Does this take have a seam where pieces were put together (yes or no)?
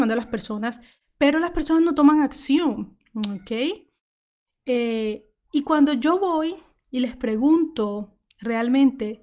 no